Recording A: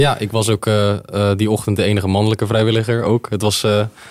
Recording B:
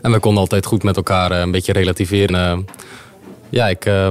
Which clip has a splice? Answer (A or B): B